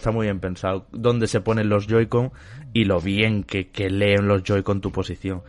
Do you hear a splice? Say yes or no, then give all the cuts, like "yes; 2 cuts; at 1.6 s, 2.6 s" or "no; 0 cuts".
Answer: no; 0 cuts